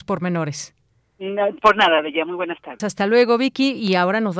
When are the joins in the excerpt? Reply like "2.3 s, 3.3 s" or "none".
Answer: 2.8 s